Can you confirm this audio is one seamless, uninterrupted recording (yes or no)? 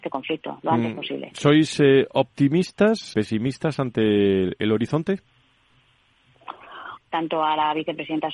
no